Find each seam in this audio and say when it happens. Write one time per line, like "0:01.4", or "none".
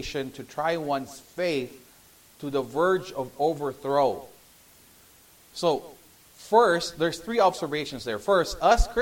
none